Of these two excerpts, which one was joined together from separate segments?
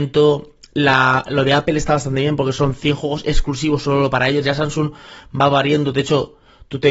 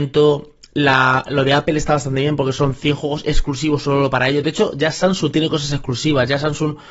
first; 1 cut; at 4.4 s

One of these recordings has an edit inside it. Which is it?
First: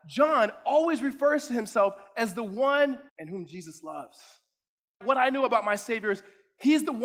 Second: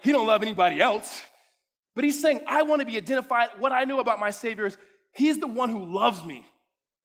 first; 2 cuts; at 3.1 s, 5.0 s

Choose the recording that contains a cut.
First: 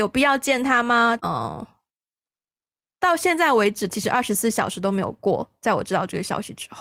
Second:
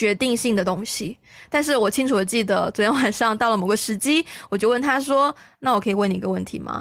first; 2 cuts; at 1.2 s, 3.9 s

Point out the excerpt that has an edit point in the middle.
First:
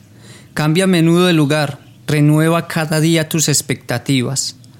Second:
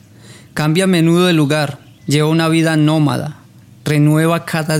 first; 1 cut; at 2.0 s

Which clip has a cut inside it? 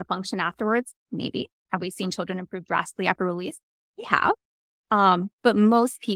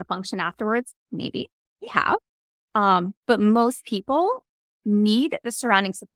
second; 1 cut; at 1.7 s

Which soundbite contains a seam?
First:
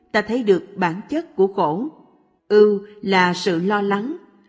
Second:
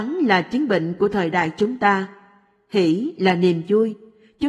first; 1 cut; at 2.4 s

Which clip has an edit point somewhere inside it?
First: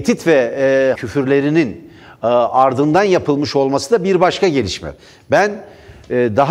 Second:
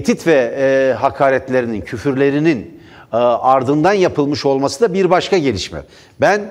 first; 1 cut; at 0.9 s

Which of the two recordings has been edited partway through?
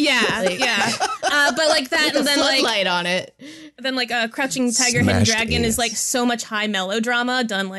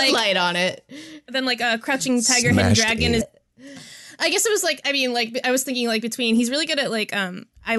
second; 1 cut; at 3.2 s

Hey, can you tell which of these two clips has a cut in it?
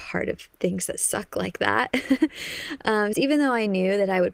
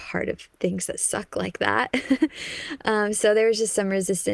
first; 1 cut; at 3.1 s

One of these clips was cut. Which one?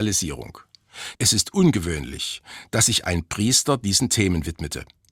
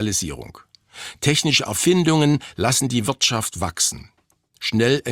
first; 1 cut; at 1.1 s

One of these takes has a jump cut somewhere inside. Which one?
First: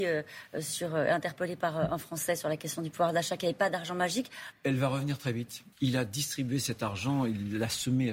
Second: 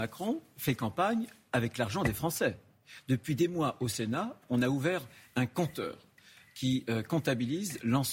first; 2 cuts; at 4.5 s, 5.7 s

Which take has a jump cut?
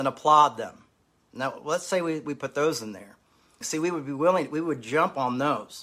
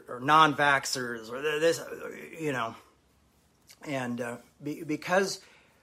first; 1 cut; at 3.6 s

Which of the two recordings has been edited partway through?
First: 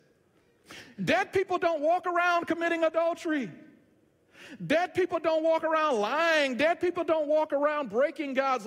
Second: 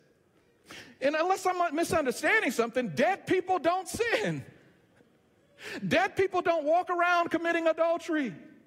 first; 1 cut; at 1.0 s

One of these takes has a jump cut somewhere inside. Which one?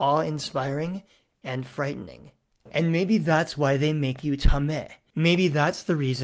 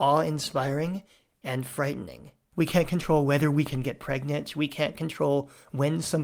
second; 1 cut; at 2.5 s

